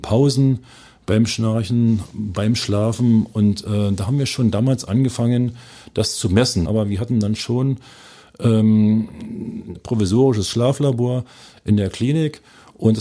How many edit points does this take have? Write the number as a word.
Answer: two